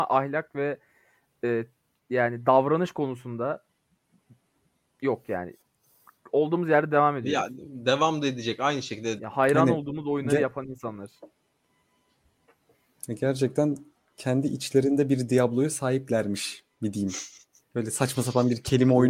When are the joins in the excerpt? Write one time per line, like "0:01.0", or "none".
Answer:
0:09.2